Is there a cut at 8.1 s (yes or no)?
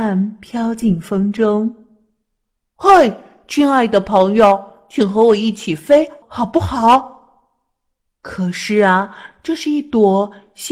yes